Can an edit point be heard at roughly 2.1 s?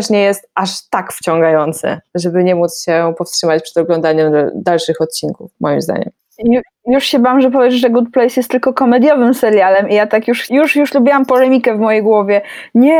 no; 1 cut; at 10.5 s

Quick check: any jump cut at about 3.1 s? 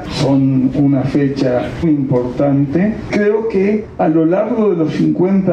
no; 1 cut; at 1.8 s

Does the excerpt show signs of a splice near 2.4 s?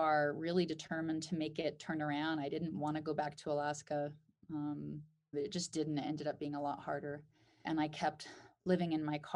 no; 2 cuts; at 5.3 s, 7.6 s

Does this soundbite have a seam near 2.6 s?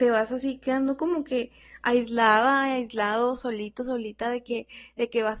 no; 0 cuts

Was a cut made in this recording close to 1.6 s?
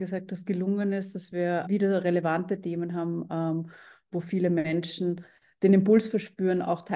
yes; 1 cut; at 1.6 s

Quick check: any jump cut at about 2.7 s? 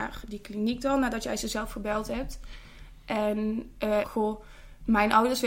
no; 1 cut; at 4.0 s

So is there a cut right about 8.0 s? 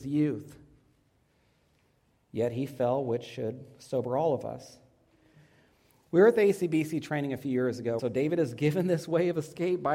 yes; 1 cut; at 8.0 s

